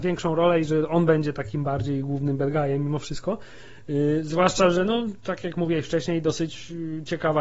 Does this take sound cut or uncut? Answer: uncut